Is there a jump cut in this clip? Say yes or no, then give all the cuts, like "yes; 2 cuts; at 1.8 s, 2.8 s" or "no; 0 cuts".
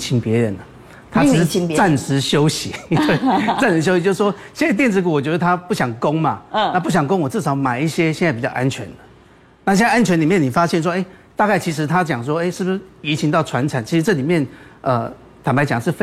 no; 0 cuts